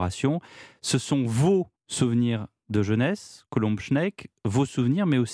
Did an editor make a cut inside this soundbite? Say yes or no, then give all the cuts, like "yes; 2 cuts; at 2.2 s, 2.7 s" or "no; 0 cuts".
yes; 1 cut; at 1.7 s